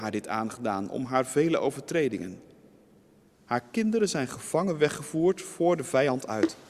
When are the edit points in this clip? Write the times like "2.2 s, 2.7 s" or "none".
none